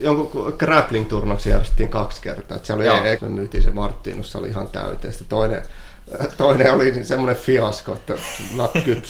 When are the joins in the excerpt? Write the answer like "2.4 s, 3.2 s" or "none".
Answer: 3.1 s